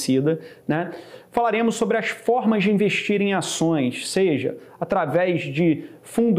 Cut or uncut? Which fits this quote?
uncut